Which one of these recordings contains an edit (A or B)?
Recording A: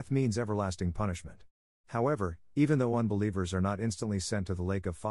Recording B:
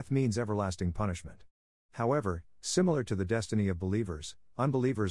A